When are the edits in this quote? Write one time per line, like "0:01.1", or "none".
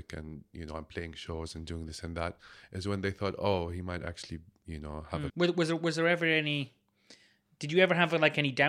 0:05.3